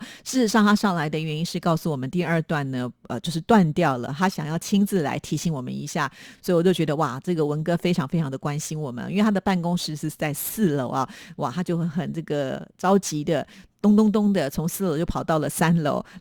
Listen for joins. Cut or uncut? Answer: uncut